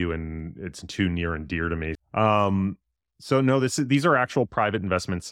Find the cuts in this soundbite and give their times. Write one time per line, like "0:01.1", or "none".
0:02.0